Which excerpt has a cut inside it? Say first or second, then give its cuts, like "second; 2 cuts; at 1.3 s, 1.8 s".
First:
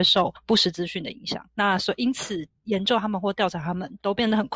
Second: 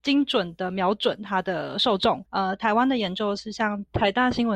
second; 1 cut; at 2.3 s